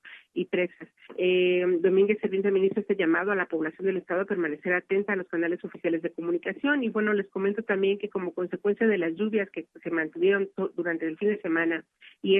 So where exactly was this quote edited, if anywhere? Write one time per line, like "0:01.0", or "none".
0:01.1